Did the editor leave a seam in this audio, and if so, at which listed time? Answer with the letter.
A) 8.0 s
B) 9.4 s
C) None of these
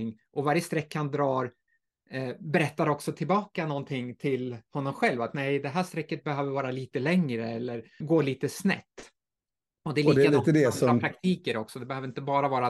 A